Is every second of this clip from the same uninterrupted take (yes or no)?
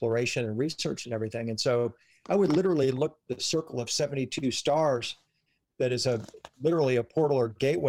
no